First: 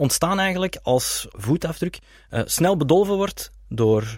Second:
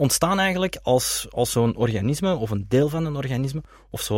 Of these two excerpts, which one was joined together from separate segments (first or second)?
first